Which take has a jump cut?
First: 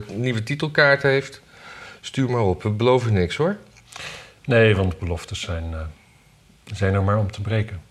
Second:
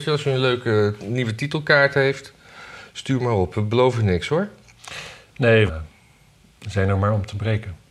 second; 1 cut; at 5.7 s

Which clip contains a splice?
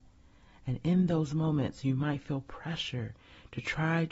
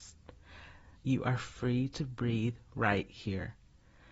second; 1 cut; at 0.9 s

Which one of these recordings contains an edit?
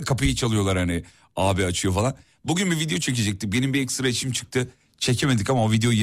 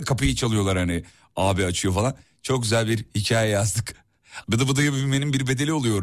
second; 2 cuts; at 2.3 s, 4.4 s

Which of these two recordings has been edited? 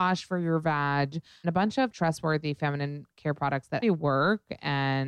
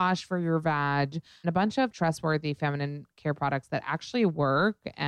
first; 1 cut; at 3.8 s

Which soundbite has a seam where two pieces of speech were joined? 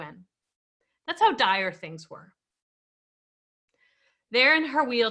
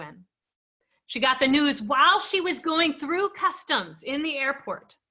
second; 1 cut; at 0.9 s

